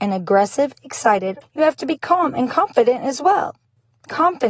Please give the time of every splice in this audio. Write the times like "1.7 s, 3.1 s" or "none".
1.4 s

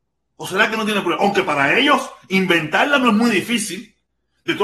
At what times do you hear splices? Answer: none

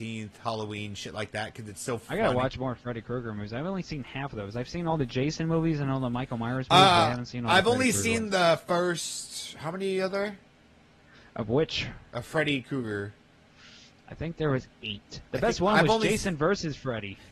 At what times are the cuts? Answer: 14.7 s

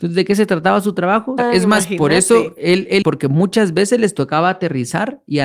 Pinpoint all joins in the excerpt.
1.4 s, 3.0 s

